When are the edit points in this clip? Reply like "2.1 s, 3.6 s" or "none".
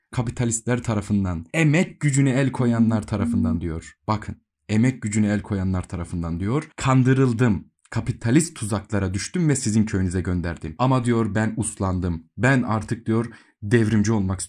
none